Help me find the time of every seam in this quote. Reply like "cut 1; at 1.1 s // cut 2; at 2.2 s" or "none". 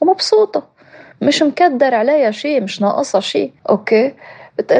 cut 1; at 3.6 s

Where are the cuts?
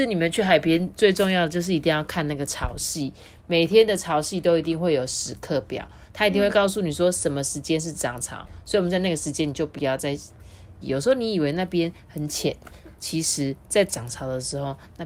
cut 1; at 10.8 s // cut 2; at 12.9 s

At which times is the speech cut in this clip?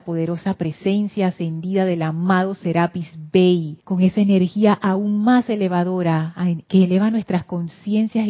cut 1; at 3.8 s // cut 2; at 6.6 s

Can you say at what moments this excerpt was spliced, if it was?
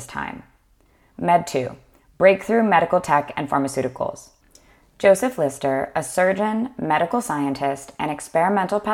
none

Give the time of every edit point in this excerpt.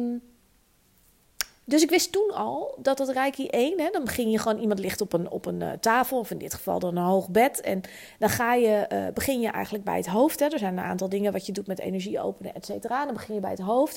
none

